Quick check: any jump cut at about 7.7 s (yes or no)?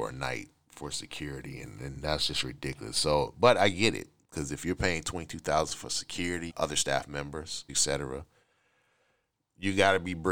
yes